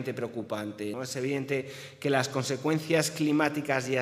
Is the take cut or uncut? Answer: cut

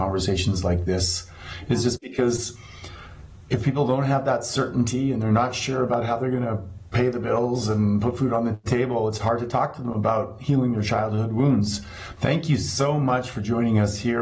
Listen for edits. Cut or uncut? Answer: cut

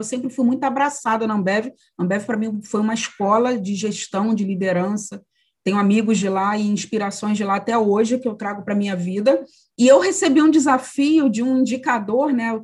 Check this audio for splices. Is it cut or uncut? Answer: uncut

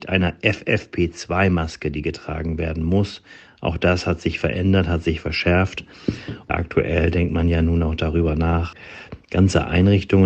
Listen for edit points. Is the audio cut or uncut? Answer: uncut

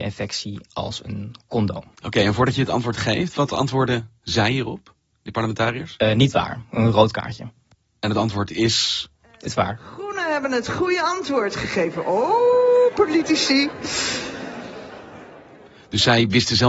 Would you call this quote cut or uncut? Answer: uncut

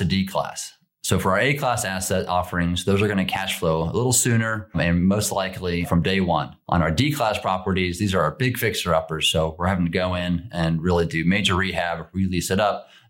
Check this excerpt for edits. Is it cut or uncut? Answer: uncut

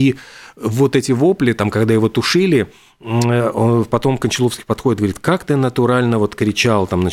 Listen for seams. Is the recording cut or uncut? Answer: uncut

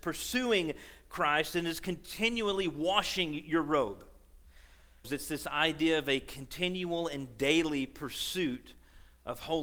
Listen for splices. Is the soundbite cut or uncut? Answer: cut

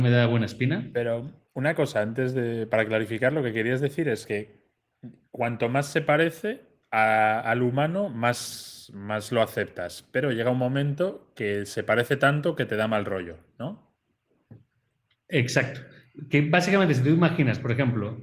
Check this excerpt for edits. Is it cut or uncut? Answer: uncut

